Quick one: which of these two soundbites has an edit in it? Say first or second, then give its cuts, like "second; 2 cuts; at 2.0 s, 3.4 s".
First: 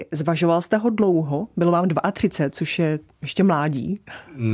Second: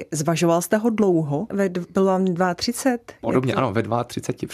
second; 1 cut; at 1.5 s